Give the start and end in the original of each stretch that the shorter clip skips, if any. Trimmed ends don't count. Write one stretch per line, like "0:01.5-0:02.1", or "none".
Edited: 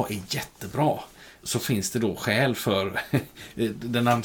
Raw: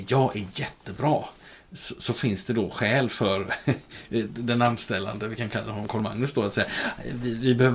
0:01.7-0:02.0